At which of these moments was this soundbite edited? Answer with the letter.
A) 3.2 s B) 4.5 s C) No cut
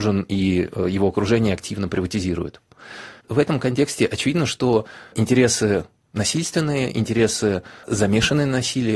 A